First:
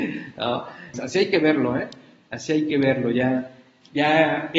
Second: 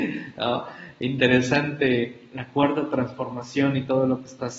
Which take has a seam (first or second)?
first